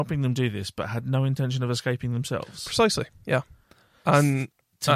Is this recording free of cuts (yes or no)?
yes